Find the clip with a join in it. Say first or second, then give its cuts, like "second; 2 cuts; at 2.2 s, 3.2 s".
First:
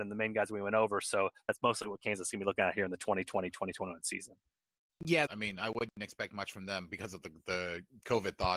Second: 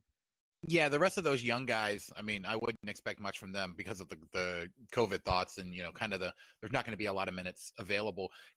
first; 1 cut; at 5.3 s